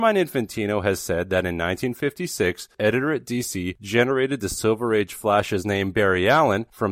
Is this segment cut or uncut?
cut